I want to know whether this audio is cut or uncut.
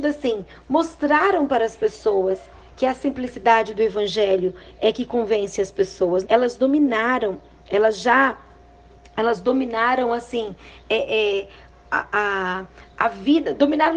cut